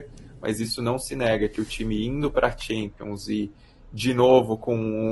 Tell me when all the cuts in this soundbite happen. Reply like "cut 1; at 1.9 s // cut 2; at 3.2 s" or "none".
none